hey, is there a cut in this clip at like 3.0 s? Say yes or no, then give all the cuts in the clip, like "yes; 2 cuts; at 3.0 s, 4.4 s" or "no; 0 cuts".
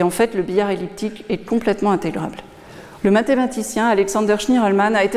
yes; 1 cut; at 3.0 s